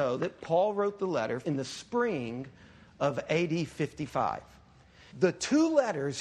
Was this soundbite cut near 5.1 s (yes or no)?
yes